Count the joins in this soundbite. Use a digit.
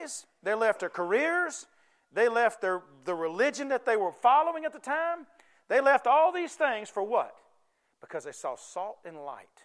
0